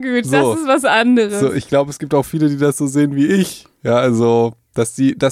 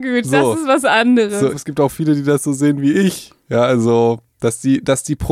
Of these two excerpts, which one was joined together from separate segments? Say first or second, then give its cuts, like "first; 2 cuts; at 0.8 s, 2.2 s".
second; 1 cut; at 1.5 s